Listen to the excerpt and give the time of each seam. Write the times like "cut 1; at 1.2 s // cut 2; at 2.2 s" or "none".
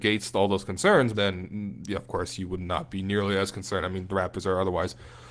cut 1; at 1.1 s